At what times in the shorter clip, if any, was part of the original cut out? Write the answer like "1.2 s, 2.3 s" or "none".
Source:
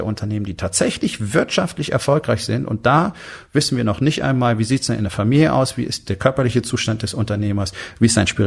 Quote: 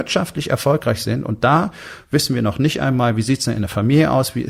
none